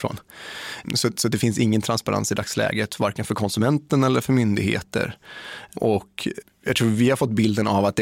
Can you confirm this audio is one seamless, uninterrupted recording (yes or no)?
yes